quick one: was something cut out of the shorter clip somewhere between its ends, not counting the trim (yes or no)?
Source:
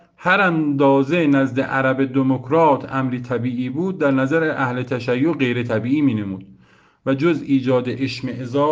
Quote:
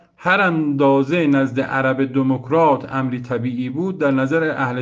no